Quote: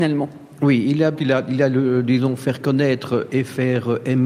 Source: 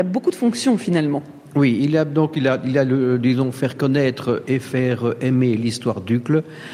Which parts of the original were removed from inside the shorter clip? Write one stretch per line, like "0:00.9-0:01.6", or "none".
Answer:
0:02.1-0:02.3